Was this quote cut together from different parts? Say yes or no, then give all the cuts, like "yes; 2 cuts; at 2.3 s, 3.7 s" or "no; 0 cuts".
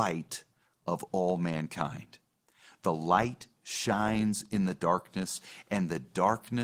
no; 0 cuts